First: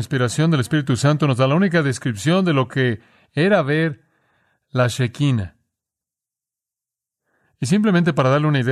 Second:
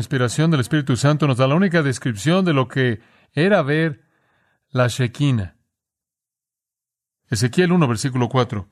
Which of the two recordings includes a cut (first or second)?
second